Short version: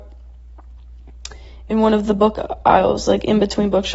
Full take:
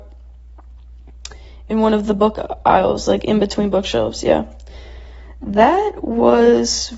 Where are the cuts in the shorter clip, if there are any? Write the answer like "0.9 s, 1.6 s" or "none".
none

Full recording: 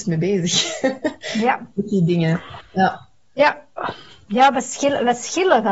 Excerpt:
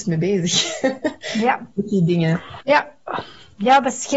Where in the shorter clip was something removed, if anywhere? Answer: 2.6 s

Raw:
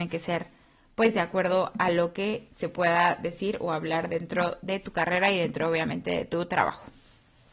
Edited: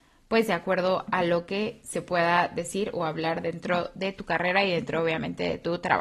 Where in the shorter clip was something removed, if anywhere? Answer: none

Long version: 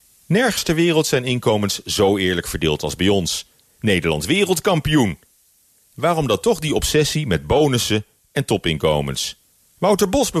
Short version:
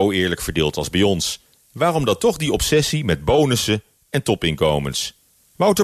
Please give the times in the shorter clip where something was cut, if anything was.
1.6 s

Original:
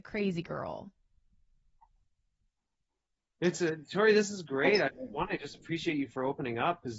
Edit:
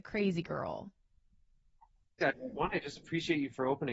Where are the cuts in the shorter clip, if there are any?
2.2 s

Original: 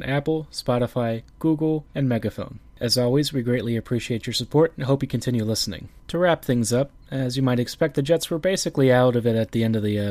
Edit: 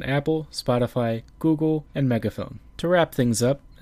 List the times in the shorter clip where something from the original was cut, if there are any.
2.7 s

